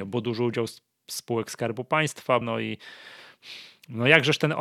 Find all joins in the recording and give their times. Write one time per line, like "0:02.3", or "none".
0:02.4

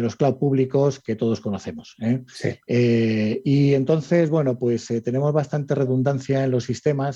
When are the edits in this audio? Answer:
none

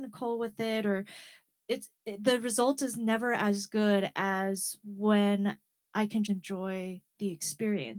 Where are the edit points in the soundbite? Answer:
0:02.0
0:06.3

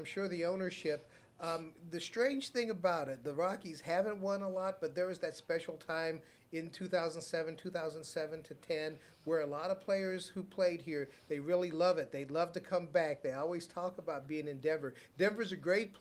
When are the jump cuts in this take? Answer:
none

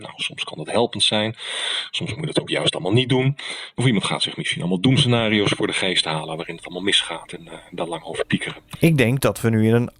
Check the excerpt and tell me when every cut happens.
none

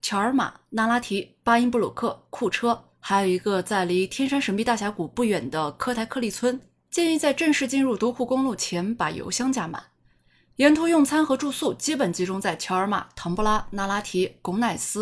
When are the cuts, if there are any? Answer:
none

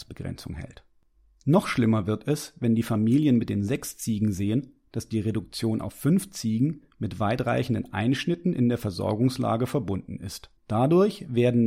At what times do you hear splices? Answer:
0:10.6

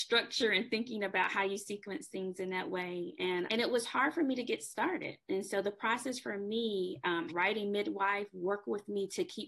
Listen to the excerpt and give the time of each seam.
0:03.5
0:07.3

